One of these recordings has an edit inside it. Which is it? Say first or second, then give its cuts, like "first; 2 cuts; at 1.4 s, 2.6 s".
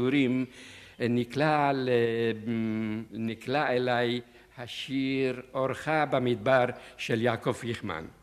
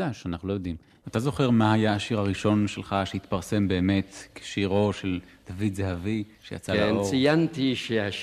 second; 1 cut; at 6.3 s